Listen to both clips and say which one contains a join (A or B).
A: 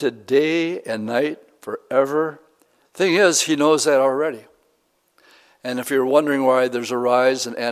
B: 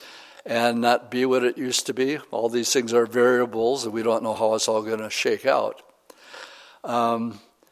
A